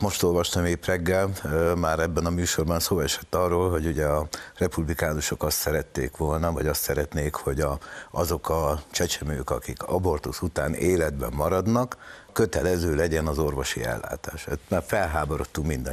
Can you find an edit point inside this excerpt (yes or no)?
yes